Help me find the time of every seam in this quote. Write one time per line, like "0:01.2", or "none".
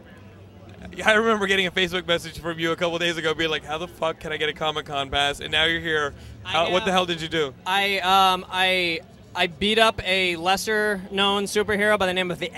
none

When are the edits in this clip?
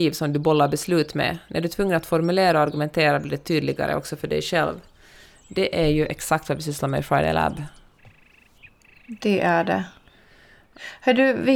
none

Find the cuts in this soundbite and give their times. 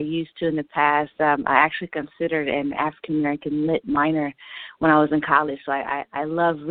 none

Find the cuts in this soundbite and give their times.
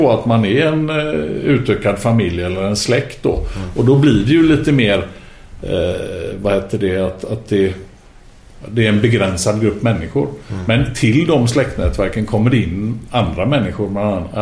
none

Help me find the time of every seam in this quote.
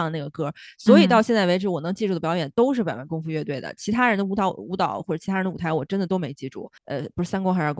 0:06.8

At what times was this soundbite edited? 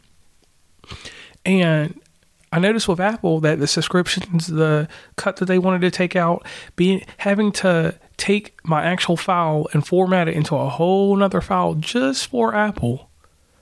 none

